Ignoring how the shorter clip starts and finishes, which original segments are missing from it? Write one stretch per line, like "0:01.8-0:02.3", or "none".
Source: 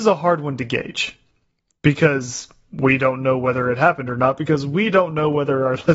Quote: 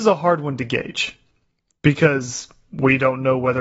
none